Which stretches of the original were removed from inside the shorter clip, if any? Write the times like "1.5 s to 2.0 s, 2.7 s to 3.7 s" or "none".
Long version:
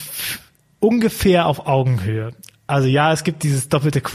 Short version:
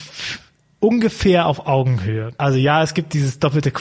2.4 s to 2.7 s